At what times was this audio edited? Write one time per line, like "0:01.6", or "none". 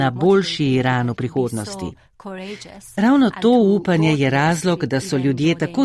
none